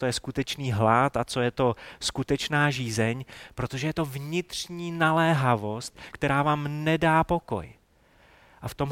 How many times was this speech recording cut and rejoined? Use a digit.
1